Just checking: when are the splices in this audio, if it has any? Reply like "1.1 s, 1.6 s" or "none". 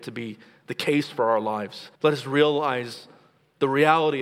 1.9 s